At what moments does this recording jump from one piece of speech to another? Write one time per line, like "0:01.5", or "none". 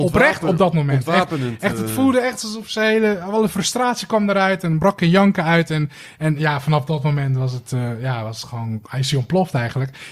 none